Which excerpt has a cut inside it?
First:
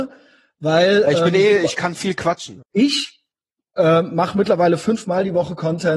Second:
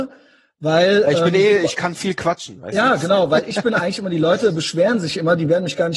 first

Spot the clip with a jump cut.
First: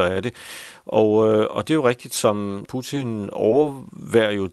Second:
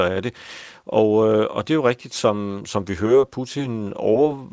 first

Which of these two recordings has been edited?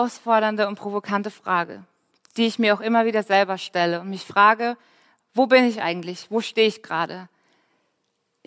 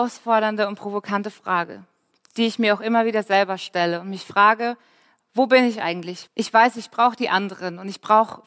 second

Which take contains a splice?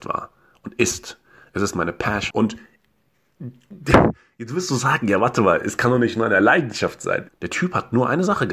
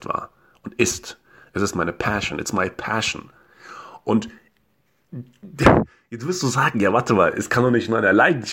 first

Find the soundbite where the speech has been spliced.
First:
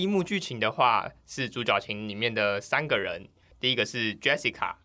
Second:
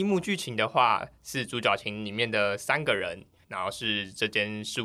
second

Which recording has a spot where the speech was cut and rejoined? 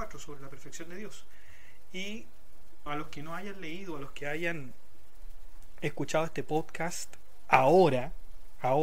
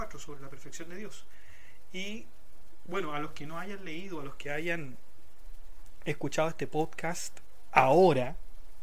first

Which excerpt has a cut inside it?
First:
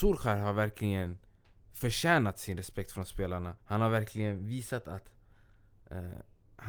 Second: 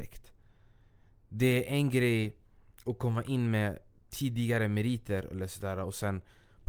first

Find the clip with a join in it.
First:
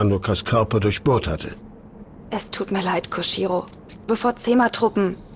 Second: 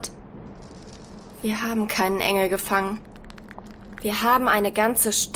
first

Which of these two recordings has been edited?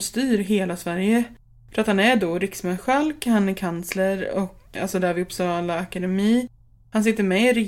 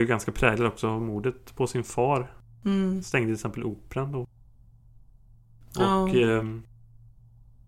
first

